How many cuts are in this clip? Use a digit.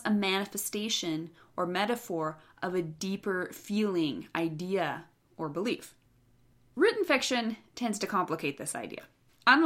0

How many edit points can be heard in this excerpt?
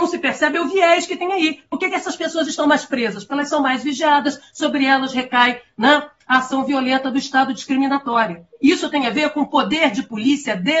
0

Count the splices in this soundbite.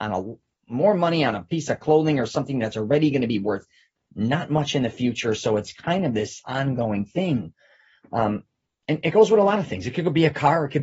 0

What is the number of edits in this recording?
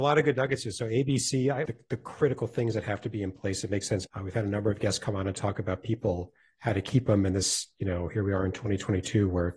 2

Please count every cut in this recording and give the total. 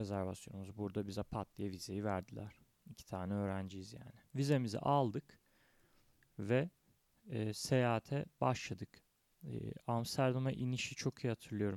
1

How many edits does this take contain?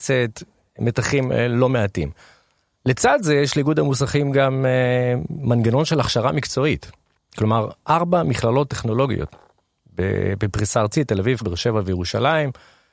1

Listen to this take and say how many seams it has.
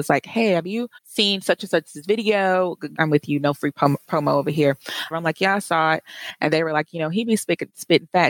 3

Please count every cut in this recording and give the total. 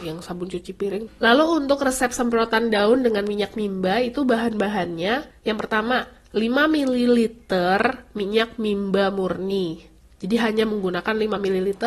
1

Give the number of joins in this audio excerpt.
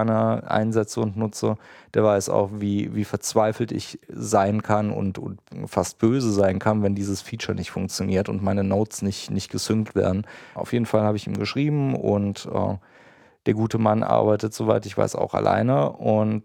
1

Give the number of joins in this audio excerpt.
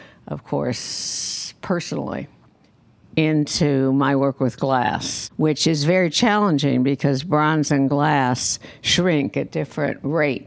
1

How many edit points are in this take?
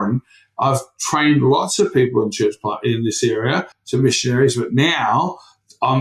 1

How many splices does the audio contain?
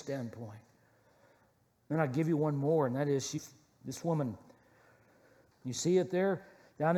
1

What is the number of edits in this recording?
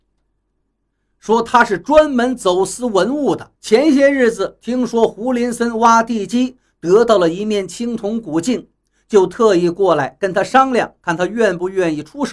1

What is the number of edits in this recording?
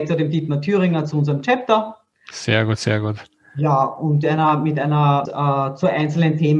2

